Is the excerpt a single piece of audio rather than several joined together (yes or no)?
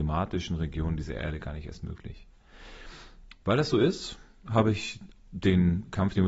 yes